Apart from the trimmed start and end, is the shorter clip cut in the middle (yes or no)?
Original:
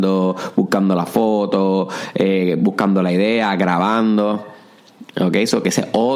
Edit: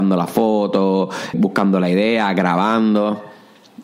yes